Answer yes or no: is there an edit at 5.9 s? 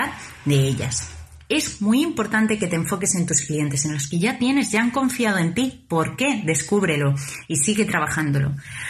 no